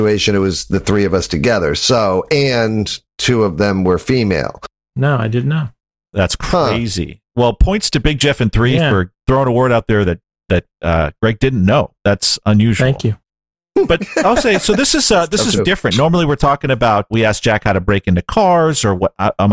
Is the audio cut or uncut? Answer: cut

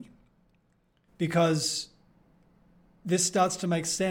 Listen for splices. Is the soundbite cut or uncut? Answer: cut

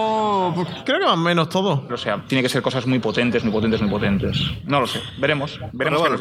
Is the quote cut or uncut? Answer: cut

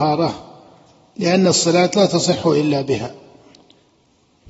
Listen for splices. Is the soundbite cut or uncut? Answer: uncut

